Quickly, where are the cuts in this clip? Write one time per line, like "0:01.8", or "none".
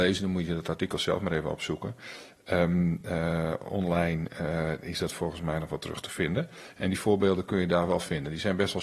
none